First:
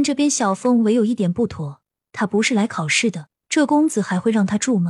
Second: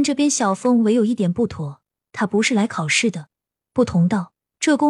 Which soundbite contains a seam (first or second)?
first